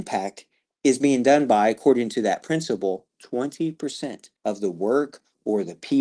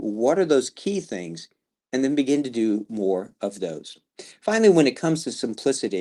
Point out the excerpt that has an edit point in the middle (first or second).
first